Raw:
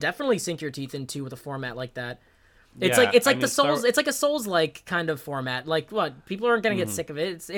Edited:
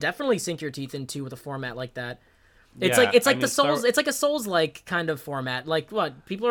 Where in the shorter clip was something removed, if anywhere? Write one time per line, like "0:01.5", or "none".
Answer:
none